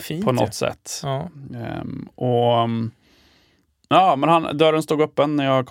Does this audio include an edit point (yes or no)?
no